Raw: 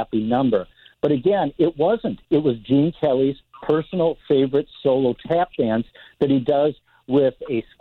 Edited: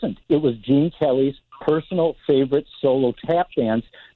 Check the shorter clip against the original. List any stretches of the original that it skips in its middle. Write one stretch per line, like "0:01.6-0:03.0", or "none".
none